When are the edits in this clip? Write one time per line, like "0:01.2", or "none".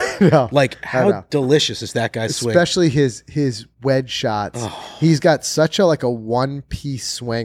none